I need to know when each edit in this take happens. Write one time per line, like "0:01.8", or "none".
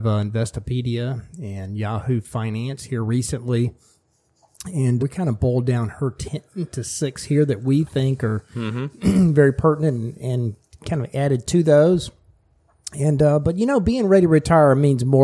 0:05.0